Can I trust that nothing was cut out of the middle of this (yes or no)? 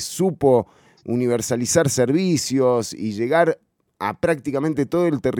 yes